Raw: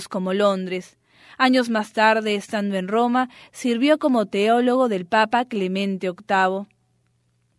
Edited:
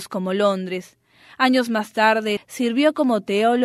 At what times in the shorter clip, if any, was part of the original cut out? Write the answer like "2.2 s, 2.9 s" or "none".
2.4 s